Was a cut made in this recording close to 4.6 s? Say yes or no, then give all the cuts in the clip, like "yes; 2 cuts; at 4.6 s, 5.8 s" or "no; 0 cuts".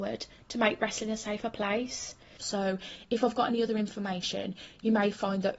no; 1 cut; at 2.4 s